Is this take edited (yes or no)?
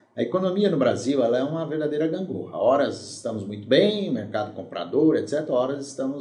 no